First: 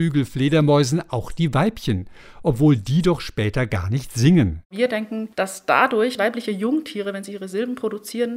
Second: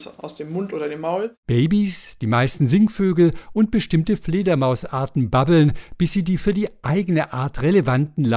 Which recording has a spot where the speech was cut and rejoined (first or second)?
first